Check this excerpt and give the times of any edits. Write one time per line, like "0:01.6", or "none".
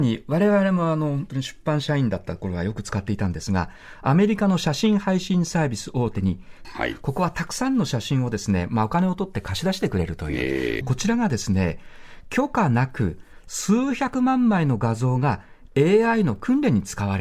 0:06.6
0:10.8